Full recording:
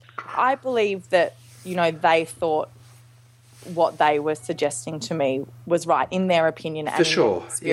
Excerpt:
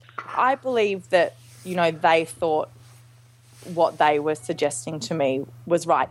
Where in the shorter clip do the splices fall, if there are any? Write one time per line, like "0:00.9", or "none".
none